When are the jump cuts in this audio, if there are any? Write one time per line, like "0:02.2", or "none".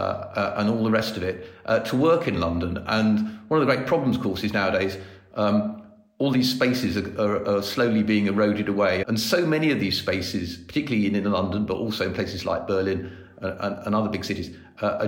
0:09.0

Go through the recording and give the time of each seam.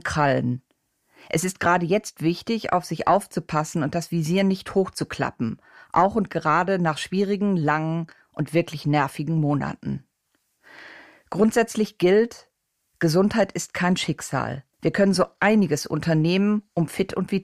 0:14.7

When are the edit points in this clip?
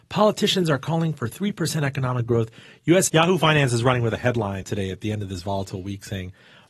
0:03.1
0:04.6

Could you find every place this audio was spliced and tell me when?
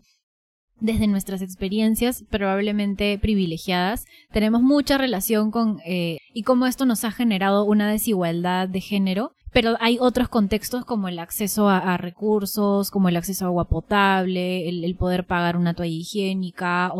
0:06.2
0:09.4

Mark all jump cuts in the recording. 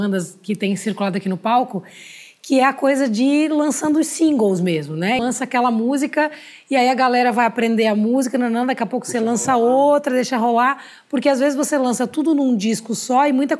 0:05.2

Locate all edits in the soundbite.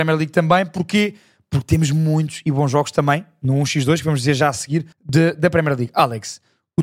0:04.9

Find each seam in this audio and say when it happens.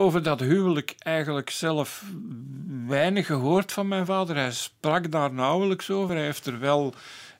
none

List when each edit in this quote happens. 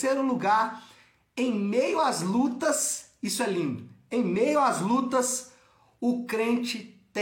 none

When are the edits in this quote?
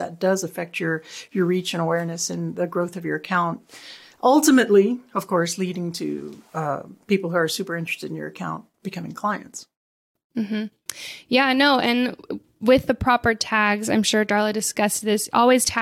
none

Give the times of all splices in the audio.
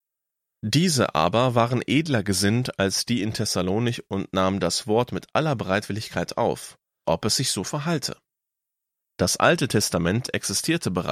0:07.0
0:09.0

